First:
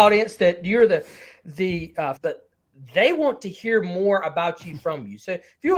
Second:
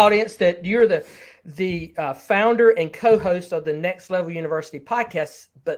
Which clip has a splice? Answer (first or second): first